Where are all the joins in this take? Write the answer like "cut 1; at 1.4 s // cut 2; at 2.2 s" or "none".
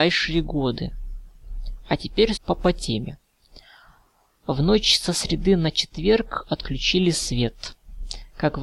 cut 1; at 2.4 s